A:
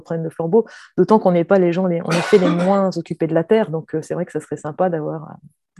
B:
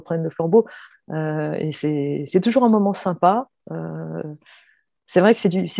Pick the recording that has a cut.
B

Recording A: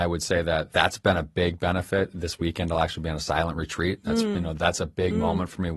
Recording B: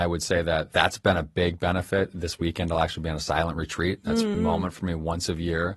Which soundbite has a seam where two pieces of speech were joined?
B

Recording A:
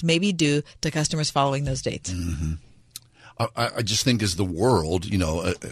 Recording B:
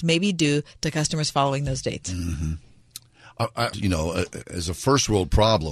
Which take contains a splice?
B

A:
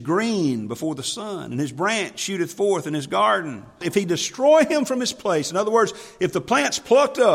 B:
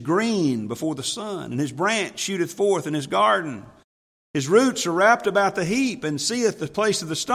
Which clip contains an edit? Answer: A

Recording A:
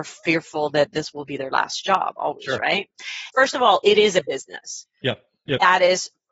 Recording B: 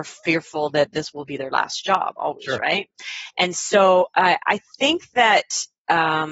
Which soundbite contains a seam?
A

